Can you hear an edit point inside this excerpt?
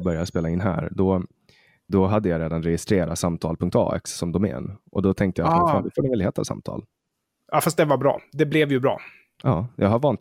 no; 0 cuts

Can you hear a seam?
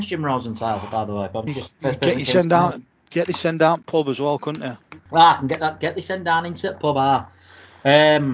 yes; 2 cuts; at 1.5 s, 5.1 s

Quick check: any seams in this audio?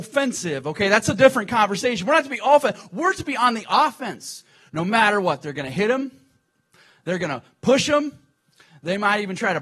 yes; 1 cut; at 4.7 s

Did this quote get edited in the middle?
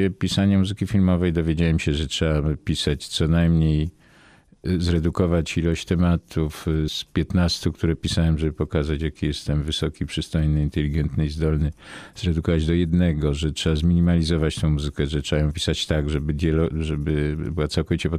yes; 1 cut; at 6.9 s

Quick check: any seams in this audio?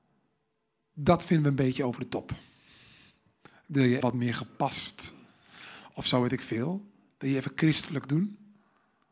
yes; 1 cut; at 4.0 s

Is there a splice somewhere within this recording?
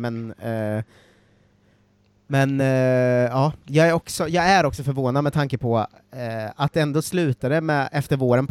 no; 0 cuts

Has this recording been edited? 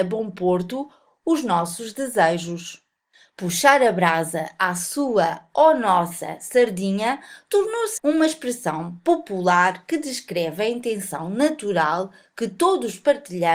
yes; 1 cut; at 8.0 s

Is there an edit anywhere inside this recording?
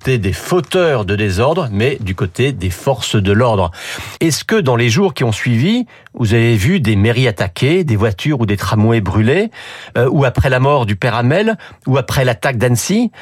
yes; 1 cut; at 4.2 s

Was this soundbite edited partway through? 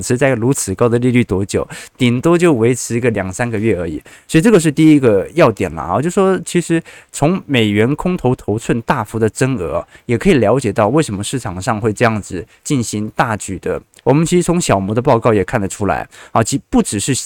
yes; 1 cut; at 14.0 s

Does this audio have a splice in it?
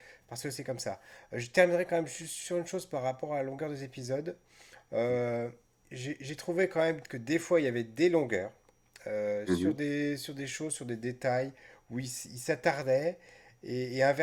no; 0 cuts

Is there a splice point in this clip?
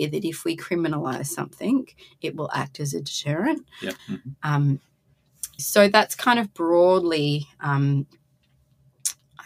yes; 2 cuts; at 4.0 s, 5.6 s

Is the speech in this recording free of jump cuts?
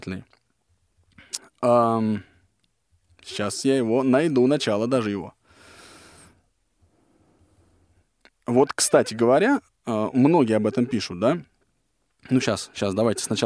yes; 0 cuts

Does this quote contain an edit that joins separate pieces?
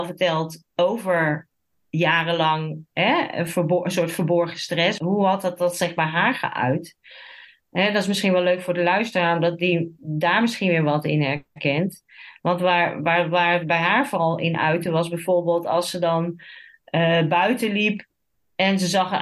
yes; 1 cut; at 5.0 s

